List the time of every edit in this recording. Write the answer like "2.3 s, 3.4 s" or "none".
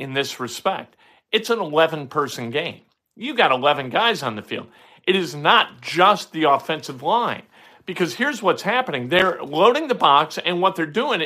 none